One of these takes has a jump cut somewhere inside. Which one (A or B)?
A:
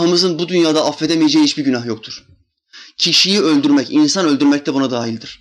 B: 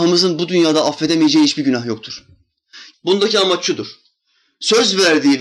B